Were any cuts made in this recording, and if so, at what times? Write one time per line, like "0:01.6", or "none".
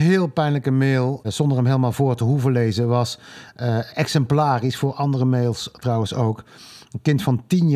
0:01.2